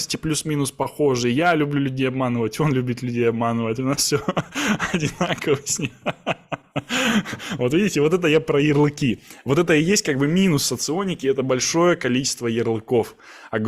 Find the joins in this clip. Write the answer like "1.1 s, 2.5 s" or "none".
none